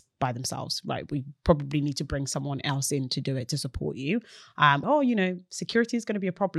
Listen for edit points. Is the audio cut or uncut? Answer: cut